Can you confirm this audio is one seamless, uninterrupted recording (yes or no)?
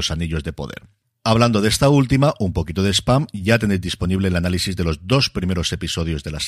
yes